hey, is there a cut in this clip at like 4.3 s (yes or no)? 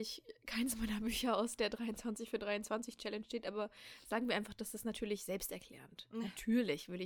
no